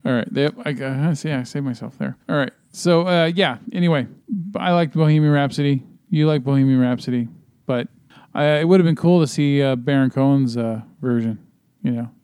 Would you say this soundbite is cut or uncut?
cut